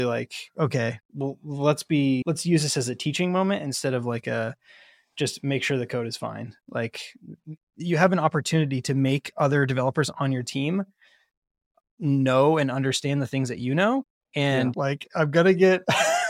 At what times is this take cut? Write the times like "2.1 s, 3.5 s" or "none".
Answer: 14.7 s